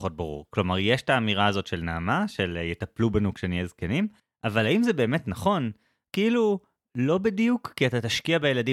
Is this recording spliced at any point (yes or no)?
no